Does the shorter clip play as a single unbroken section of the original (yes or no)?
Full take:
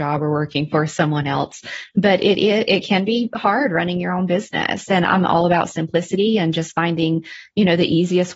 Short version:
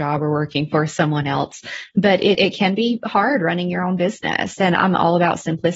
no